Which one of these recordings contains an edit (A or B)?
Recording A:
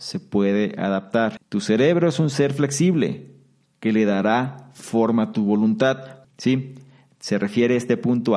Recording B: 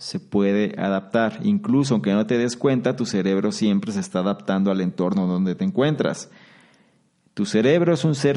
A